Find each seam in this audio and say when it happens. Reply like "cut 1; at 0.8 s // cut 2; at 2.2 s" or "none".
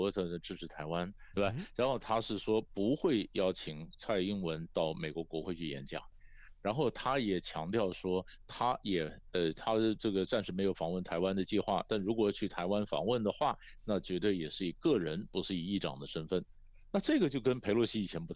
cut 1; at 1.3 s